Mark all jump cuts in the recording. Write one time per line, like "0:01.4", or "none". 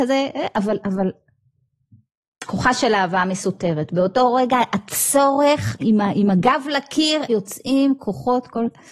0:05.8
0:07.3